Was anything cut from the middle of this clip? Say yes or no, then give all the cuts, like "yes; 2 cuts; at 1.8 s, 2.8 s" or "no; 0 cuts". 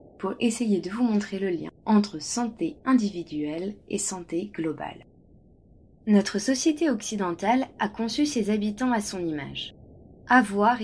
yes; 1 cut; at 1.8 s